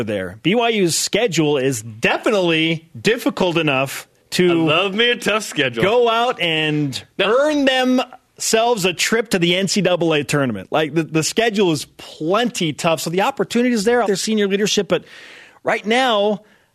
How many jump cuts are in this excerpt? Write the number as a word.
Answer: one